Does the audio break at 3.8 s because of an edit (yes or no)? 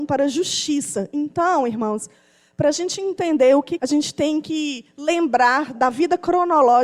yes